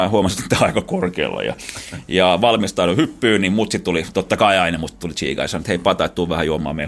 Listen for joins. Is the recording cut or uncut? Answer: uncut